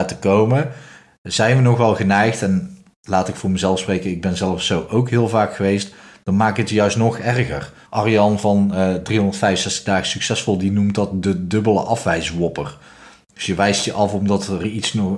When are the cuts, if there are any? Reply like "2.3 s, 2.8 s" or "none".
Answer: 7.9 s